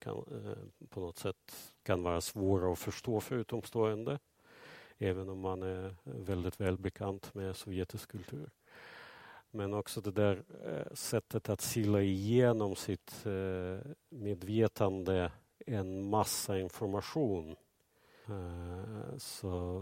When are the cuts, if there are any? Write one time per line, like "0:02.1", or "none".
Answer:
0:18.2